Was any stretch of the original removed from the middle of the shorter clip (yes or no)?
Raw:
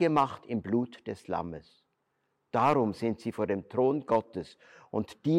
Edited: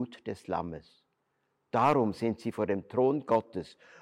no